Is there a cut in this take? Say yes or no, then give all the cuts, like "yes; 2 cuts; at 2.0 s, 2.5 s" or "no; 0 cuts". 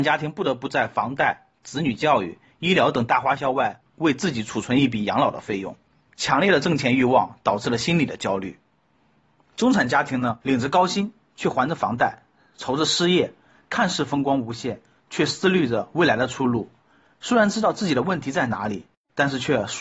no; 0 cuts